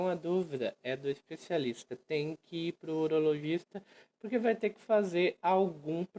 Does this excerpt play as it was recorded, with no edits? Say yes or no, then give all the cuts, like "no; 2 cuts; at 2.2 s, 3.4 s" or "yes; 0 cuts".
yes; 0 cuts